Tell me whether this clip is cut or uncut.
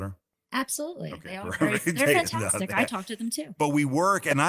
uncut